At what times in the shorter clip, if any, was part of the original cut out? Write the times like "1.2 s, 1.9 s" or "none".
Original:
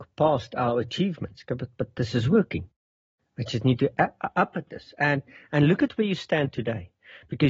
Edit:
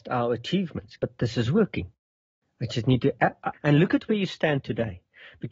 1.0 s, 3.5 s